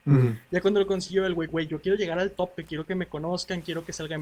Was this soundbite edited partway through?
yes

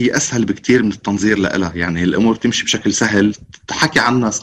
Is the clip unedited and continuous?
yes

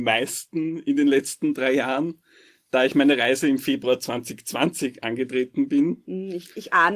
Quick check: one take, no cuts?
yes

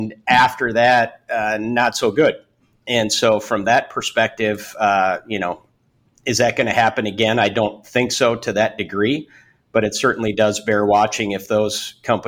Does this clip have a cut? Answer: no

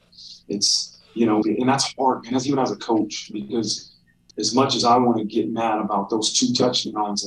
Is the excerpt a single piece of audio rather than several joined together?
no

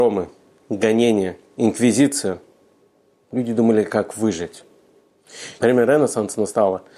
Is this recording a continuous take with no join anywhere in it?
no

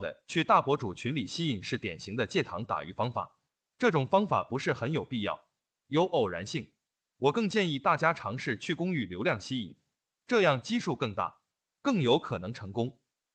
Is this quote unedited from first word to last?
yes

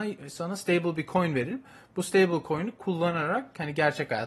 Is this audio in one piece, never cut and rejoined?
yes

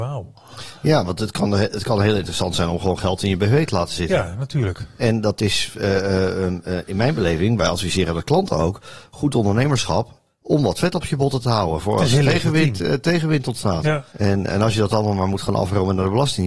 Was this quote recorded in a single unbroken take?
no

